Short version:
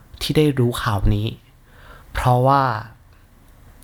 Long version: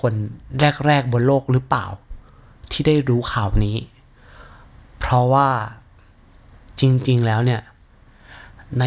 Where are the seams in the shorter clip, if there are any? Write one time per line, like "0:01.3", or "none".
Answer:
0:02.0

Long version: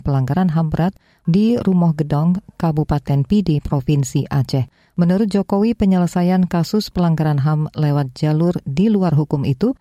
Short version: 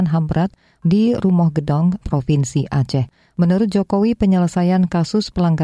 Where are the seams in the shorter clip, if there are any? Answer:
0:02.0

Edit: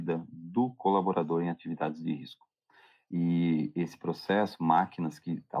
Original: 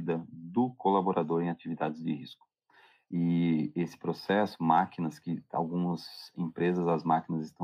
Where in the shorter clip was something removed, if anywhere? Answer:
none

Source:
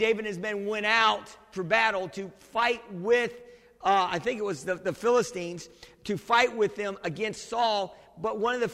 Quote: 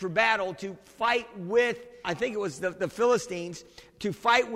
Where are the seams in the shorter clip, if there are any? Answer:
0:02.0

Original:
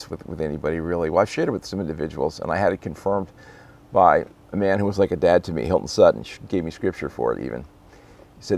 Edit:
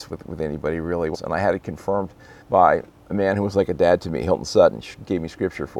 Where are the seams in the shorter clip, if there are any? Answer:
0:01.1
0:02.4

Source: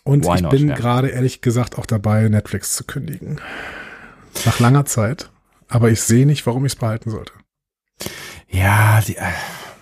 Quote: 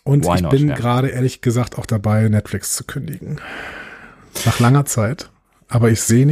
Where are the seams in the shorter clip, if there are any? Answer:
none

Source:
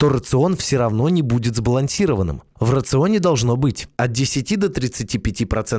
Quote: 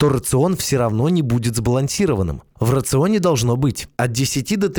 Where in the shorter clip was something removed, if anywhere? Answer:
none

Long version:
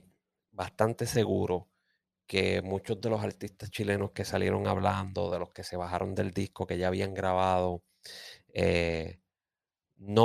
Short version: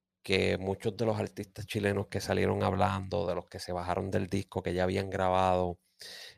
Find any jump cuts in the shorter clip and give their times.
none

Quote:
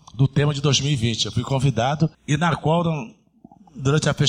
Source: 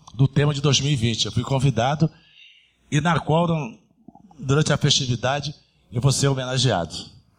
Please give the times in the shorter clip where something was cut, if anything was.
0:02.1

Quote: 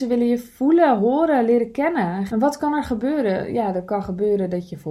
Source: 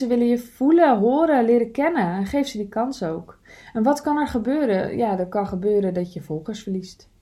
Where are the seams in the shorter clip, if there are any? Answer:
0:02.3

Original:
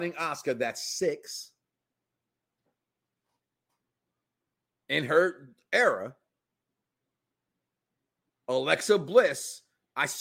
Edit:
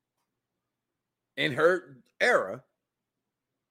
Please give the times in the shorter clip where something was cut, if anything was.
none

